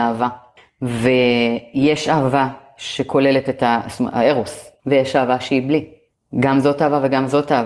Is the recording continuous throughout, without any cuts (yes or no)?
no